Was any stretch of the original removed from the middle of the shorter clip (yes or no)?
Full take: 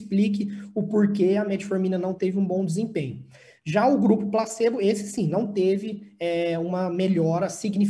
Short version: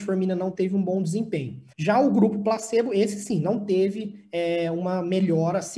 yes